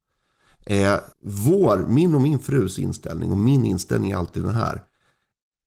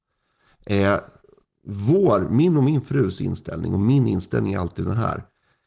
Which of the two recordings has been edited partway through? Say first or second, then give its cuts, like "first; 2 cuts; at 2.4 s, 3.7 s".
first; 1 cut; at 1.1 s